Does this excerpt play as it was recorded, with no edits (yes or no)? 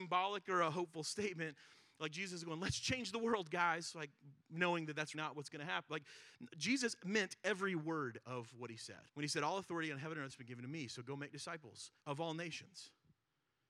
no